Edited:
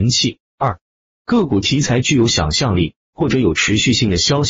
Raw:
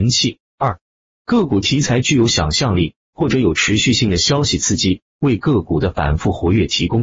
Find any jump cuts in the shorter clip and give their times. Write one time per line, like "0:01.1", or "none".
none